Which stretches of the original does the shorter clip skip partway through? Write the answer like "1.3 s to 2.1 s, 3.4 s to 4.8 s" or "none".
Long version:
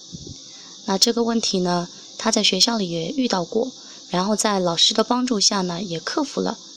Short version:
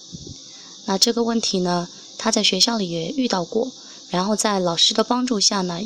none